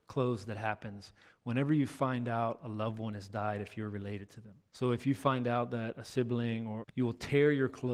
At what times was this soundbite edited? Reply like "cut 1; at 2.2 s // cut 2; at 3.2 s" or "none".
cut 1; at 4.7 s // cut 2; at 6.8 s